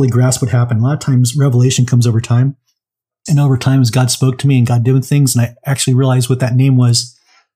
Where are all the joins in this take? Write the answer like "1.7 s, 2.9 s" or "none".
none